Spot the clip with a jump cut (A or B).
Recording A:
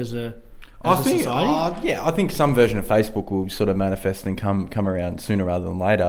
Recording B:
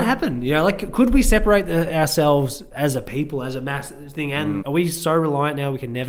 B